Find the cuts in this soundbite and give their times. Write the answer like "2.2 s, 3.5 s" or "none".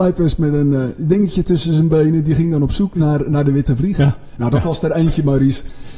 none